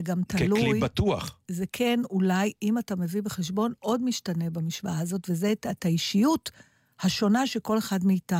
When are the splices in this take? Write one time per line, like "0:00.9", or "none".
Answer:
none